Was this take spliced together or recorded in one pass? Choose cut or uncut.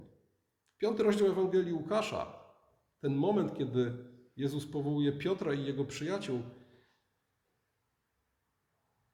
uncut